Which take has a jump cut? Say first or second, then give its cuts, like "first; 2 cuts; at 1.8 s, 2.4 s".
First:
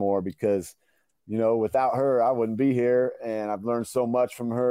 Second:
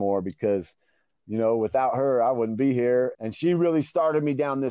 second; 1 cut; at 3.1 s